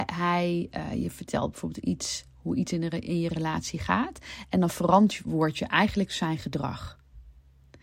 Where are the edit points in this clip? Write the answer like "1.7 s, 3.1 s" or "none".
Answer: none

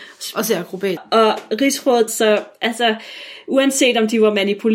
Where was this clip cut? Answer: 1.0 s, 2.1 s

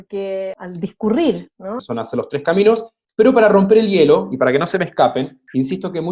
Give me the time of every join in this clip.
1.8 s

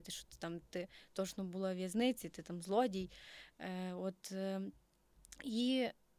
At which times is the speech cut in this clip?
none

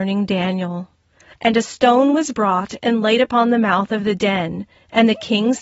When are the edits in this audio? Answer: 1.3 s

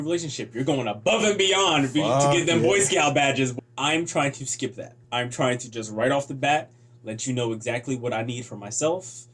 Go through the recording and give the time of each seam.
3.6 s, 5.0 s

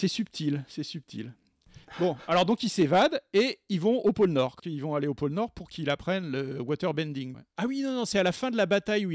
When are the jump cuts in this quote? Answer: 7.3 s

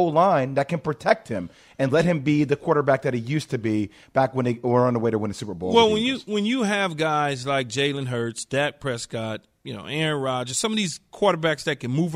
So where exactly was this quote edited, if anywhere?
none

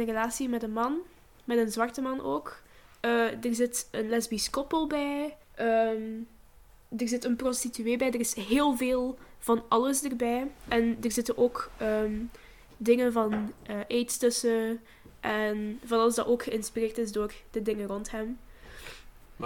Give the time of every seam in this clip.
5.4 s

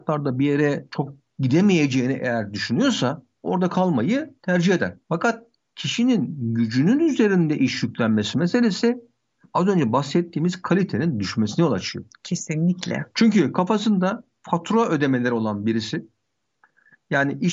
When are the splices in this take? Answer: none

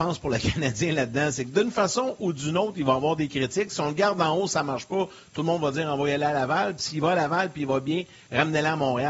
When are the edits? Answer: none

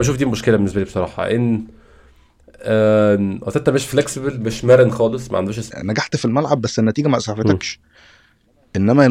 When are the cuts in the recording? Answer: 5.7 s

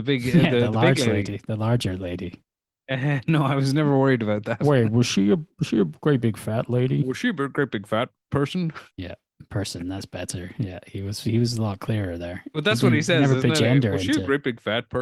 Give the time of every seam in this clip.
8.9 s

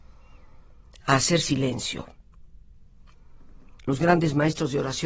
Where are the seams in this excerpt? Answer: 3.8 s

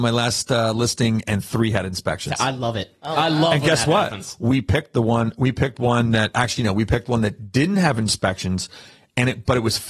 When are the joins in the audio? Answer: none

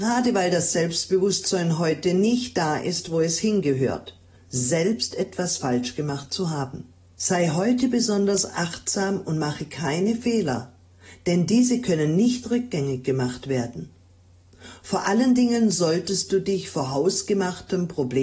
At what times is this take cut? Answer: 4.4 s, 7.2 s

